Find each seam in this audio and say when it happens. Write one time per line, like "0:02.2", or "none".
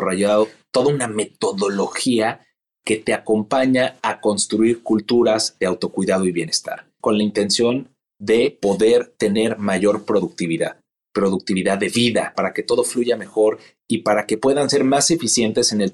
0:07.0
0:12.3